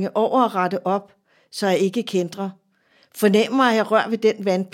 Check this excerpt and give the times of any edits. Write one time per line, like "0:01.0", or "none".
none